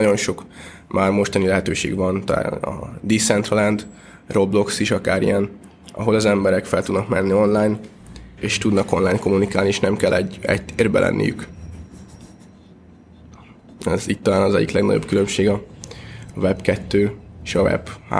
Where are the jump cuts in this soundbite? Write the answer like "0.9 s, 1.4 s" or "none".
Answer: 8.4 s